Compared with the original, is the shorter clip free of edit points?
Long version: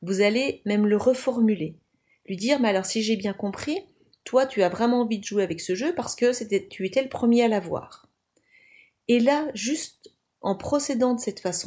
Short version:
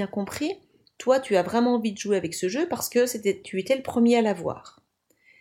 yes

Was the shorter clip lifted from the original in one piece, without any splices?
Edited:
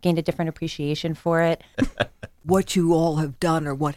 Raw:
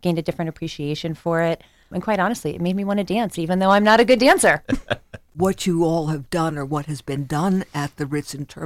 no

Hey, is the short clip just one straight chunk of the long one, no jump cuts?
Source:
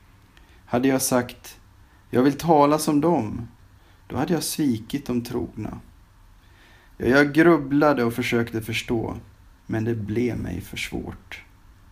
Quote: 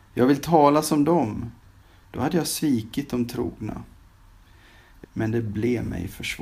no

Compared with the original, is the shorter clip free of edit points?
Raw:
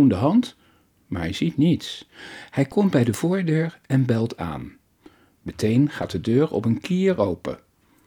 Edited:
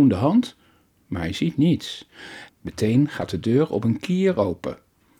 no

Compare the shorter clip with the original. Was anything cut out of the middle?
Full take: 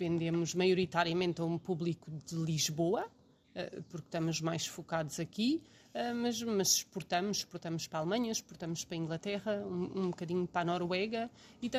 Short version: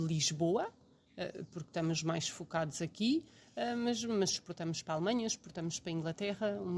yes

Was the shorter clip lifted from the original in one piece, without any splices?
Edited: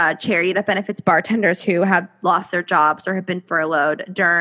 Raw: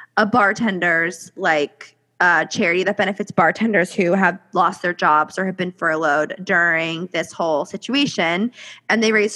yes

